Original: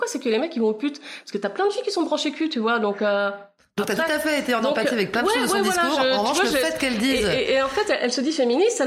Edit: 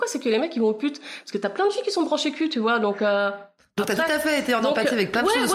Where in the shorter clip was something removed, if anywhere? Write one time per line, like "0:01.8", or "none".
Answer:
none